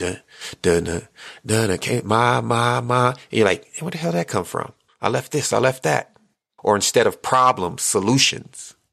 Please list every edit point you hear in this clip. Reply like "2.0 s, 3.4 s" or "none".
4.9 s, 6.6 s